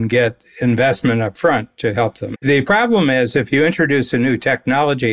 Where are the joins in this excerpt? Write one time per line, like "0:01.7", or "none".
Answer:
0:02.3